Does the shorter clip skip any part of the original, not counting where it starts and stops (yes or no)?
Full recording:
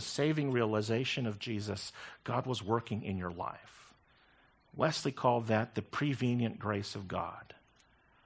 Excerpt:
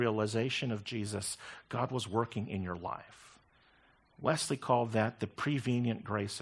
no